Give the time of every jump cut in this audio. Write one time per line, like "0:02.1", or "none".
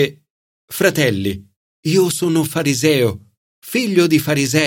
none